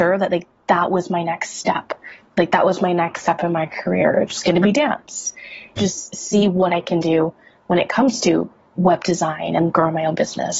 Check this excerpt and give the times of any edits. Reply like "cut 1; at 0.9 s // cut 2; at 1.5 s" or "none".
cut 1; at 5.8 s